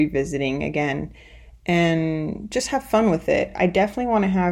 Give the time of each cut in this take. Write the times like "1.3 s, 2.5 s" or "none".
none